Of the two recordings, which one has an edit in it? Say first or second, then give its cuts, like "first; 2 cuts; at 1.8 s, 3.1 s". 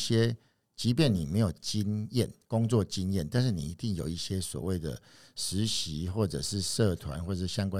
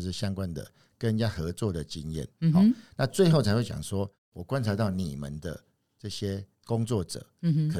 second; 2 cuts; at 2.3 s, 6.5 s